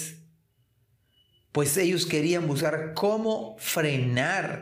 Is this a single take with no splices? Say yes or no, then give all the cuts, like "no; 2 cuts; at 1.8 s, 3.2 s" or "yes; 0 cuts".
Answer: yes; 0 cuts